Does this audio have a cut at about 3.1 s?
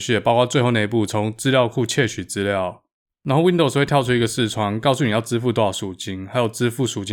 yes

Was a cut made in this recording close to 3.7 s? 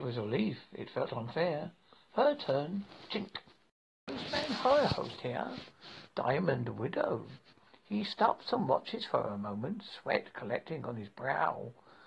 no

